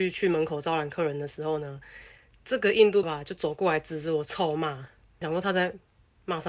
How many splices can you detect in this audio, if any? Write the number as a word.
two